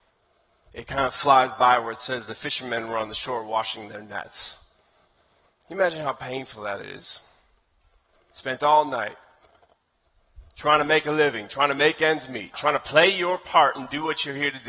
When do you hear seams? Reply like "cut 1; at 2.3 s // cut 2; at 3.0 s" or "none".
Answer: cut 1; at 12.5 s